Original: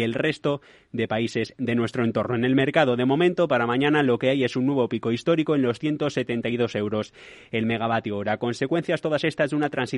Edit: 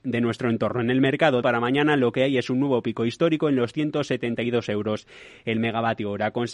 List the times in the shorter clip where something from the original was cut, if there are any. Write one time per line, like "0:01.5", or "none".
0:01.4